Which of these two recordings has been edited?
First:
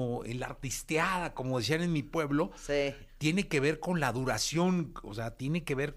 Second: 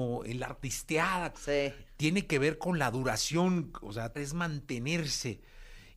second; 2 cuts; at 1.3 s, 4.1 s

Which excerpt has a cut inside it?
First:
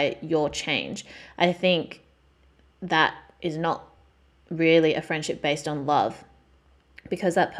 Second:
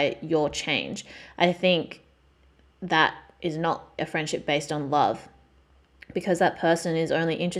second; 1 cut; at 4.0 s

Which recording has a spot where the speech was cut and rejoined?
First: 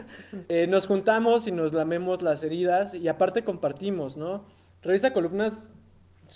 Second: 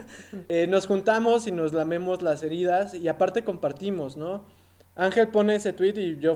first; 1 cut; at 4.7 s

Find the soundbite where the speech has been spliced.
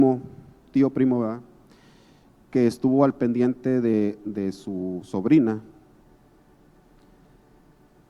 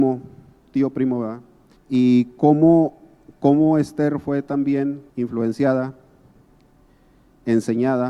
second; 2 cuts; at 1.8 s, 5.1 s

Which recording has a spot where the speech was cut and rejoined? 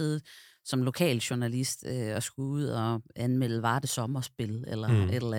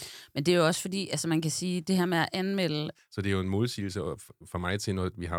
second; 1 cut; at 2.9 s

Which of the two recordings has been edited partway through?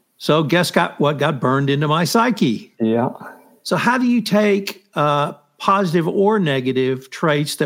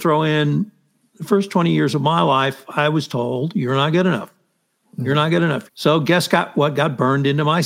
second; 1 cut; at 5.7 s

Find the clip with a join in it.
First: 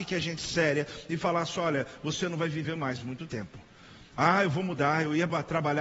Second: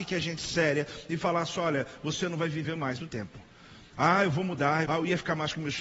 second; 2 cuts; at 3.0 s, 4.8 s

